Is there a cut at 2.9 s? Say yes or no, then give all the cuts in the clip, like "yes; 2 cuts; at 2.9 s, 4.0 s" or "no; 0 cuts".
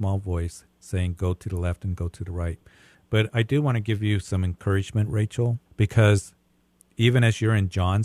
yes; 2 cuts; at 2.9 s, 5.7 s